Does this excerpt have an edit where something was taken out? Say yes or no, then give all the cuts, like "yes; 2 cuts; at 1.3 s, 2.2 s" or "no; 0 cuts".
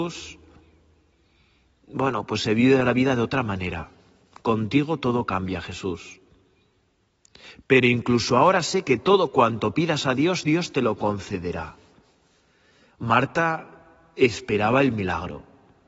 no; 0 cuts